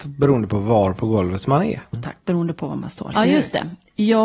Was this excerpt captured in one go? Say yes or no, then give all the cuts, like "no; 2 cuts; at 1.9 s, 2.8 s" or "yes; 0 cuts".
no; 2 cuts; at 1.9 s, 3.1 s